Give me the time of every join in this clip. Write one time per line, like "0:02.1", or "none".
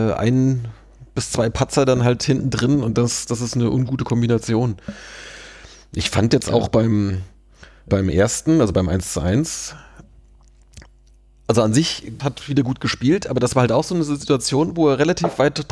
0:12.2